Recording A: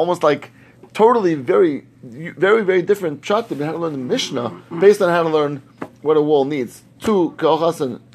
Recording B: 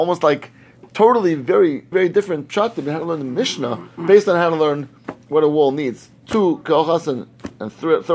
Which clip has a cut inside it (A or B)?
B